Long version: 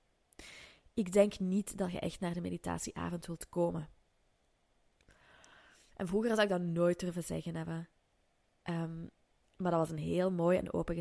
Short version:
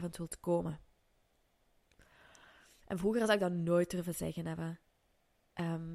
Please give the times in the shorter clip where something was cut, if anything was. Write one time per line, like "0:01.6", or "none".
none